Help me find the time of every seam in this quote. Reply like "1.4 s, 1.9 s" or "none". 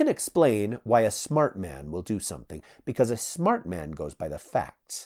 none